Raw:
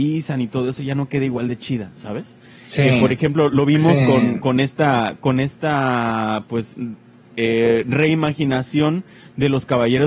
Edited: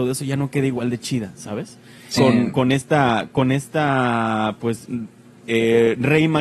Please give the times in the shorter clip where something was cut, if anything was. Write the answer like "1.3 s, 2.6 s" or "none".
2.2 s